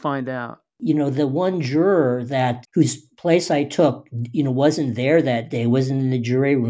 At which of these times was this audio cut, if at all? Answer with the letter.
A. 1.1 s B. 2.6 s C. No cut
B